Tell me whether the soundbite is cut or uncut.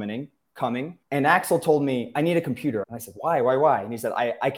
cut